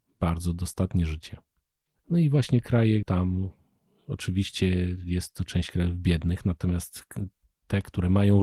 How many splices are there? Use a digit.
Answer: 2